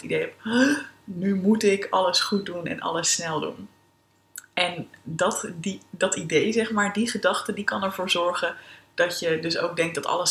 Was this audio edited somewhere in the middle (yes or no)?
no